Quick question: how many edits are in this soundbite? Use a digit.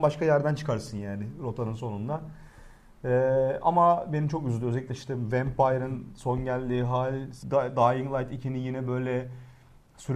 1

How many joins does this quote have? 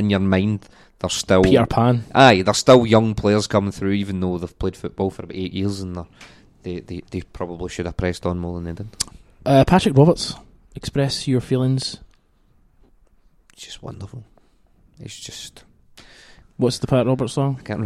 1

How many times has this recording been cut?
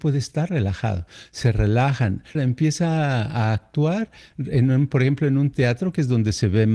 1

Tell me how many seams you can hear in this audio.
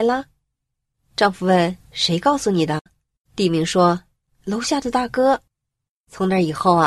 1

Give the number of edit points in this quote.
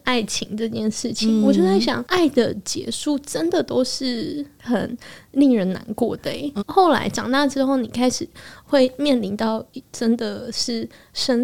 1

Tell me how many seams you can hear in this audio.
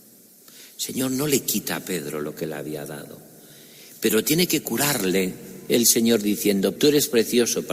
1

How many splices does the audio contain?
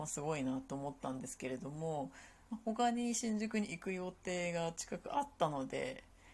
0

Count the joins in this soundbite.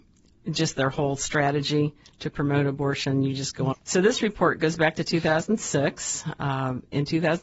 1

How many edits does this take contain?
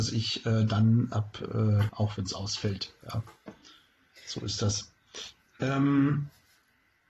1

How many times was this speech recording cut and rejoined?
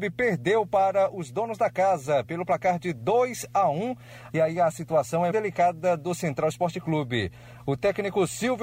2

